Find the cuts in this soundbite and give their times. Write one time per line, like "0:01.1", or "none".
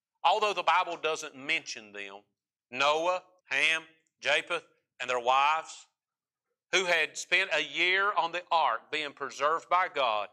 0:03.4